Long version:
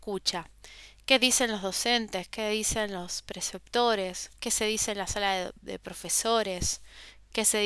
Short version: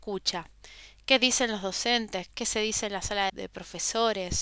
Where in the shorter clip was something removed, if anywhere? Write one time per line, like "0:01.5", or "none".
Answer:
0:02.3
0:03.3